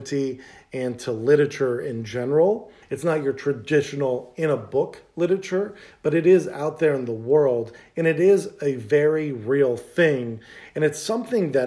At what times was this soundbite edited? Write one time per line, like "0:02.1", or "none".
0:02.8